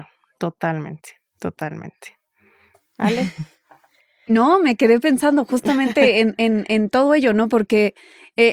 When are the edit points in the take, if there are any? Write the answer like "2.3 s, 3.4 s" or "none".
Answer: none

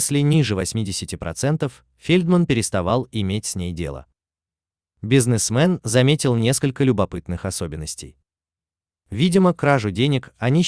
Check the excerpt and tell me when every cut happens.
9.0 s

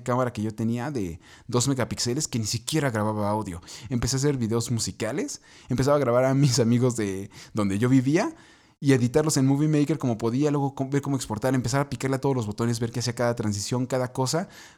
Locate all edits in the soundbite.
none

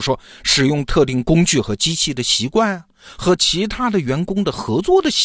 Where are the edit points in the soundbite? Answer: none

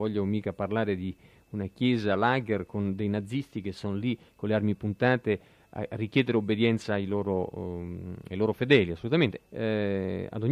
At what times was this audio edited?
9.4 s

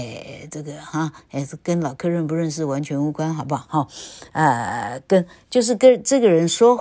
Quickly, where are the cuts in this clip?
none

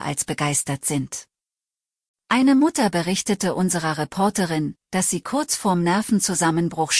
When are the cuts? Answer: none

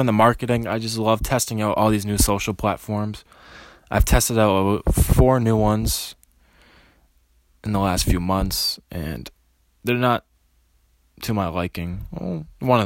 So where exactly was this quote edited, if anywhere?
none

